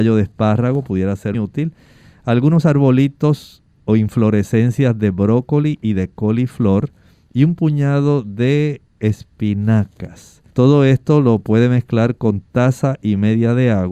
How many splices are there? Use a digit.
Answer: 2